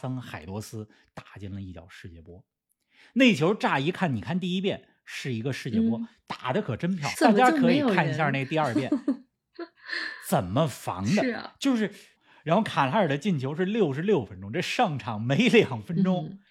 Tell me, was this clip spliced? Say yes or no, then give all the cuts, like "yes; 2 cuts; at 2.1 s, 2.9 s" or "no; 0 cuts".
yes; 2 cuts; at 7.1 s, 12.2 s